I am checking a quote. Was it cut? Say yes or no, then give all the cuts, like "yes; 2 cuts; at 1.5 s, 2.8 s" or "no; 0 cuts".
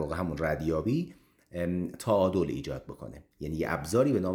yes; 1 cut; at 3.3 s